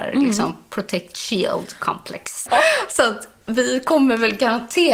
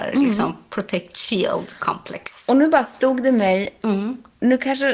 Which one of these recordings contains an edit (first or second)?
first